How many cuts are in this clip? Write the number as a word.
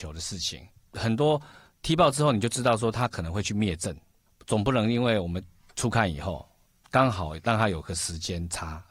zero